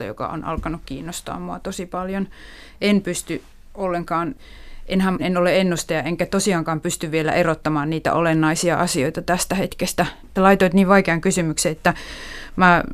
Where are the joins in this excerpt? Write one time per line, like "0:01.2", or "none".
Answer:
0:05.2
0:10.4